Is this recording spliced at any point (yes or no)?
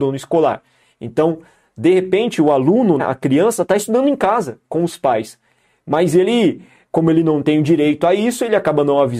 yes